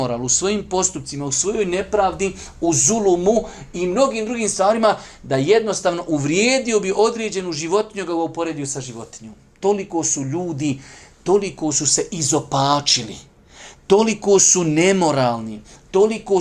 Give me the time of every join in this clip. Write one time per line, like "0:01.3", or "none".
none